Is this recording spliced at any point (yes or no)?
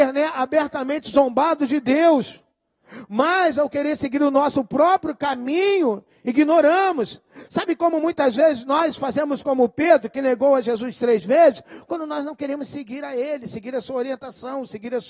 no